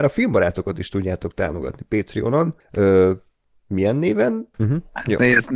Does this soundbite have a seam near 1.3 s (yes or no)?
no